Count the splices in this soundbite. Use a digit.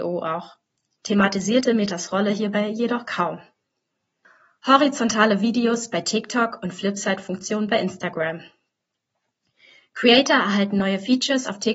0